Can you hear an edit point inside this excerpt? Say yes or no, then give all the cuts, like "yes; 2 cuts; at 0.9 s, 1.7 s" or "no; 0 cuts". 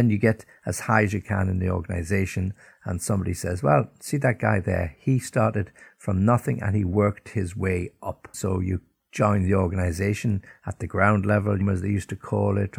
yes; 2 cuts; at 8.3 s, 11.6 s